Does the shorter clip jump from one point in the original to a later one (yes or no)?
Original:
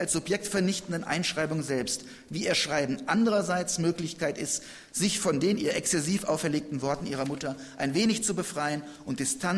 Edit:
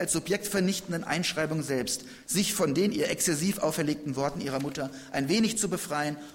yes